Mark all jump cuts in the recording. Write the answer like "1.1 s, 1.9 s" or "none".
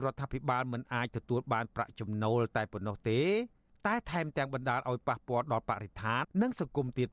6.2 s